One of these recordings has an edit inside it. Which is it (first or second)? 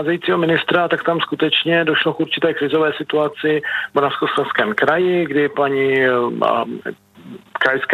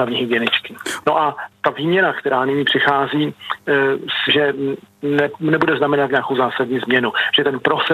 second